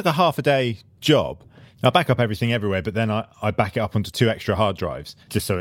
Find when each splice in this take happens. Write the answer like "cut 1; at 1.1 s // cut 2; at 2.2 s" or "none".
none